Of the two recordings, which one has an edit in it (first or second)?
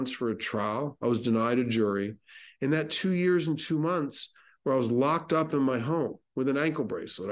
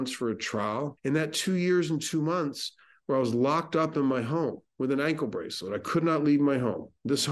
second